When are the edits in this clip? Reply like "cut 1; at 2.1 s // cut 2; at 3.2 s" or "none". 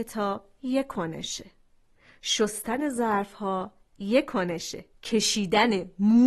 cut 1; at 4.9 s